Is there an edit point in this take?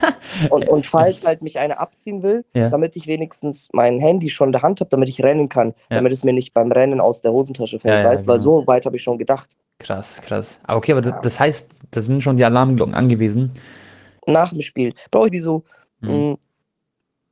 yes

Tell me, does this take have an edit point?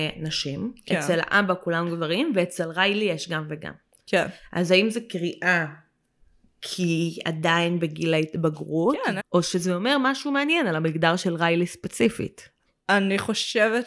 yes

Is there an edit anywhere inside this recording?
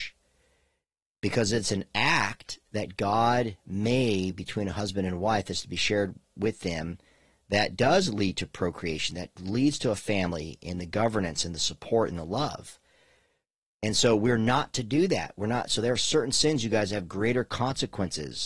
no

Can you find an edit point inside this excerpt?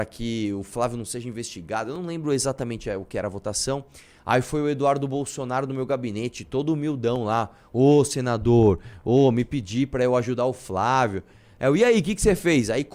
no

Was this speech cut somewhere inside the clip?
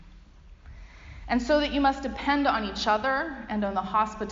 no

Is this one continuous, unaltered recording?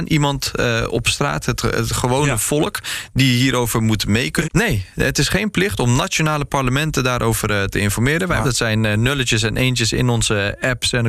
no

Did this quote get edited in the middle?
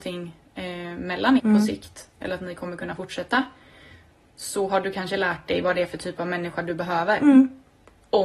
yes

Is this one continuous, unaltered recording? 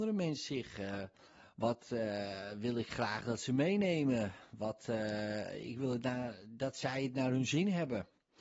yes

